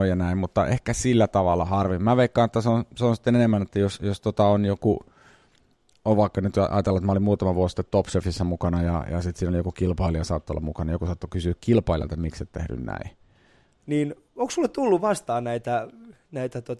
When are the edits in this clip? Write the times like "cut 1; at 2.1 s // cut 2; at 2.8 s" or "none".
cut 1; at 13.8 s